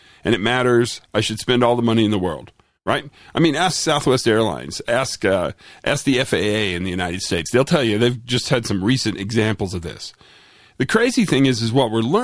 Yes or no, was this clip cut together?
no